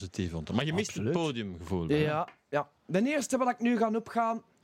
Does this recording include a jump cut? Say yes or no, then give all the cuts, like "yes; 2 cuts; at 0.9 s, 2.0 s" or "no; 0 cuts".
no; 0 cuts